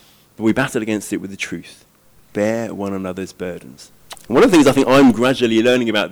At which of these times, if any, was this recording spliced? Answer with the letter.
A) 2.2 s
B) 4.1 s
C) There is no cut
B